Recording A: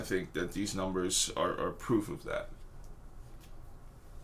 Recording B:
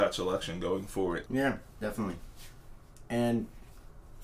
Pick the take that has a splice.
B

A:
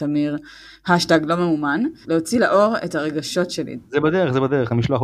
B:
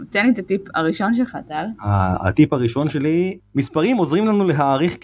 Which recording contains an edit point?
A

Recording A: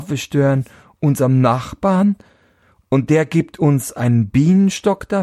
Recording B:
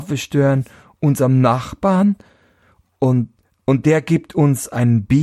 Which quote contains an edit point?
A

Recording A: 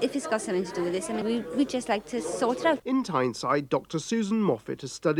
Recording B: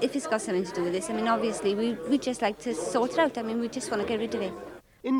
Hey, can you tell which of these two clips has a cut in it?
A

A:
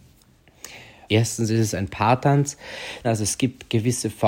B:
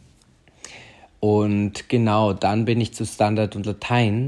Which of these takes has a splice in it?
A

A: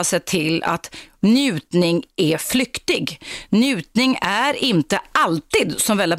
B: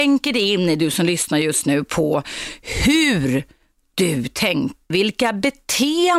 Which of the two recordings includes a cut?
B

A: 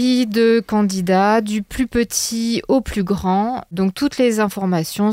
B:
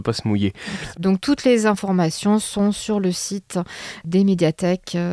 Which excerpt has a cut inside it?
B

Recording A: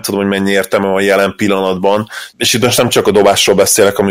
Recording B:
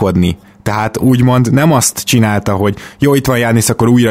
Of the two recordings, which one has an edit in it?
A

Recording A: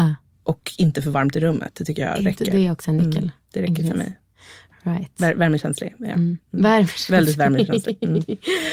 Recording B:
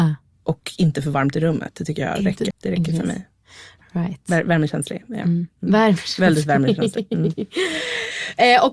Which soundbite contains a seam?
B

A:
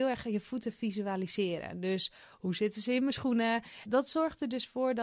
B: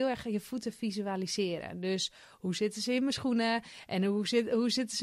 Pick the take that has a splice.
A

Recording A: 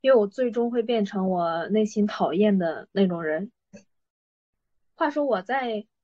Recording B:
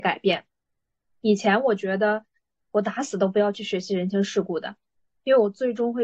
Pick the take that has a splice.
A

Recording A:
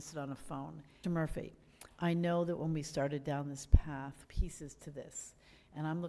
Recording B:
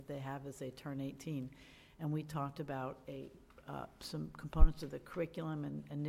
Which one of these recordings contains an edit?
A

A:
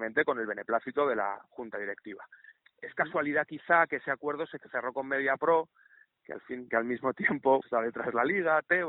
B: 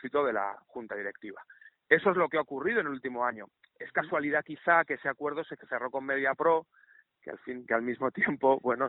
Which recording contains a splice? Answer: A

